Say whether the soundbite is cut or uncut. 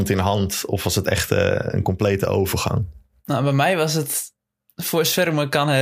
uncut